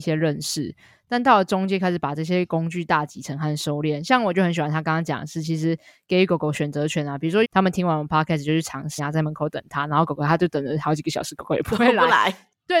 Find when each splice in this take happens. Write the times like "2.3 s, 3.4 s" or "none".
7.4 s, 9.0 s